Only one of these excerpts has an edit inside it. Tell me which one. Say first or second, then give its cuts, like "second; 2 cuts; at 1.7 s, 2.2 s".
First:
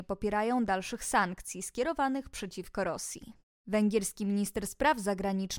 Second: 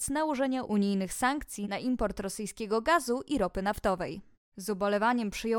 second; 1 cut; at 4.5 s